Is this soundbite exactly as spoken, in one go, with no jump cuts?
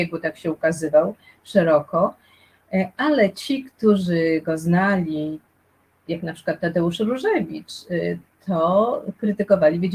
yes; 0 cuts

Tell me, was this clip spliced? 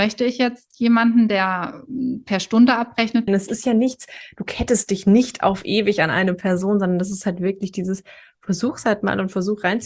yes; 1 cut; at 3.3 s

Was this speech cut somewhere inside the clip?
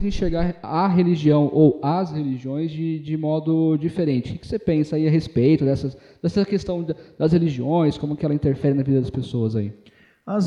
no; 0 cuts

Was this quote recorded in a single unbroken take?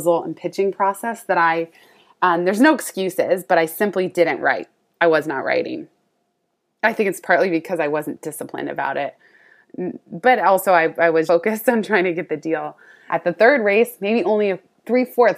no; 2 cuts; at 11.3 s, 13.1 s

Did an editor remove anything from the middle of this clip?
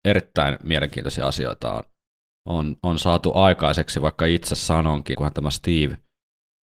yes; 1 cut; at 5.1 s

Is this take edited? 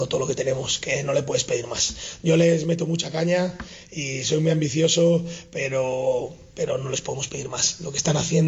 no; 0 cuts

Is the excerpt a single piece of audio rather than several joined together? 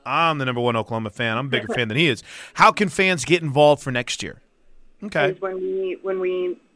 no; 1 cut; at 5.0 s

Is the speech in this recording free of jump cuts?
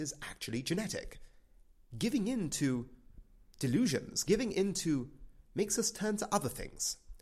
no; 2 cuts; at 1.9 s, 5.4 s

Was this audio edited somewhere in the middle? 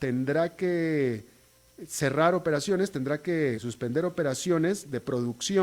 yes; 1 cut; at 3.6 s

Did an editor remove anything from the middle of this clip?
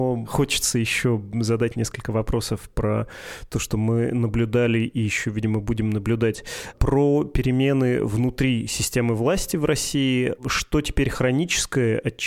no; 0 cuts

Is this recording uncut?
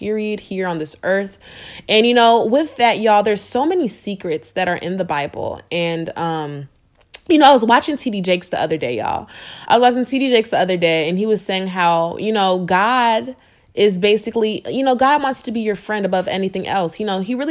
yes; 0 cuts

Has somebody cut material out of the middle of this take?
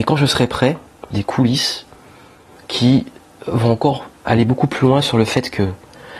yes; 1 cut; at 1.1 s

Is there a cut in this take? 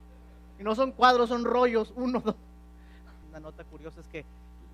yes; 1 cut; at 3.2 s

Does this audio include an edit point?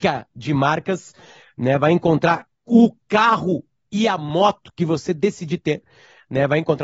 no; 0 cuts

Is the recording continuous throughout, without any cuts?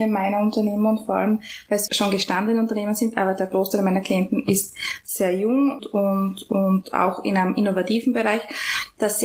no; 2 cuts; at 1.9 s, 5.8 s

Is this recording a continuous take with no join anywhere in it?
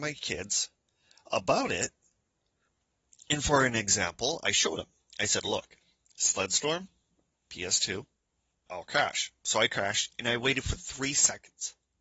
no; 1 cut; at 8.7 s

